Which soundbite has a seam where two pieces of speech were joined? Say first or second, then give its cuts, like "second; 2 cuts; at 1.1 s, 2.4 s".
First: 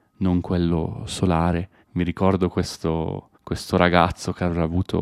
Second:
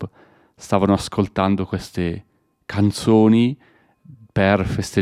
first; 2 cuts; at 1.8 s, 3.3 s